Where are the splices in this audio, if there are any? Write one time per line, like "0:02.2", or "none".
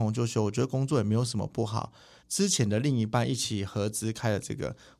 0:02.2